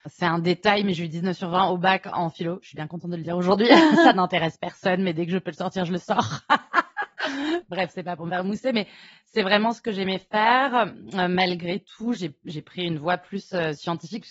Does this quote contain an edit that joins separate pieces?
no; 0 cuts

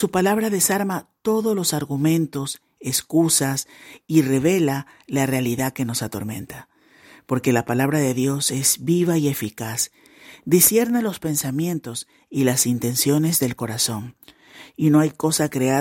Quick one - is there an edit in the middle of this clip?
no; 0 cuts

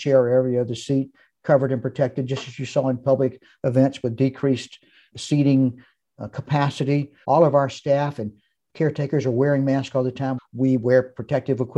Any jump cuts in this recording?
yes; 3 cuts; at 5.1 s, 7.2 s, 10.4 s

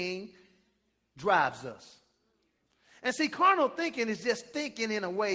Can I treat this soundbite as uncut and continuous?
yes; 0 cuts

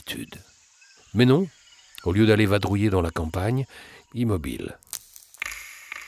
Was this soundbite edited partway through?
yes; 2 cuts; at 1.0 s, 4.0 s

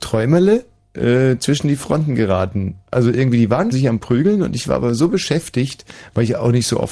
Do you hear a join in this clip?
yes; 1 cut; at 3.7 s

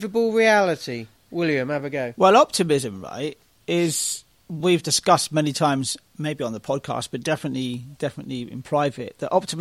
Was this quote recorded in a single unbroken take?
yes; 0 cuts

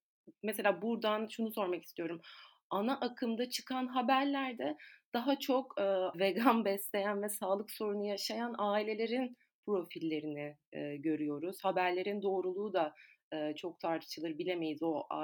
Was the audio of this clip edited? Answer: yes; 1 cut; at 6.1 s

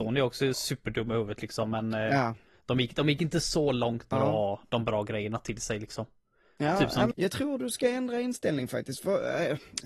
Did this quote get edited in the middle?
yes; 2 cuts; at 4.1 s, 7.1 s

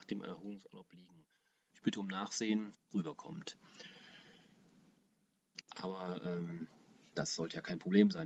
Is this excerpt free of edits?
no; 3 cuts; at 1.7 s, 2.7 s, 5.6 s

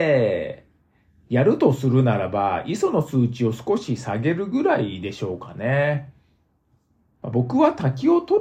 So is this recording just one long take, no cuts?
yes; 0 cuts

